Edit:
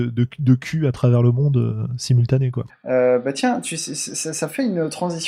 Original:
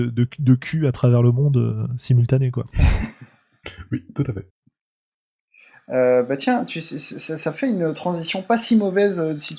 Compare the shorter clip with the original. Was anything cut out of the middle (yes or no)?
yes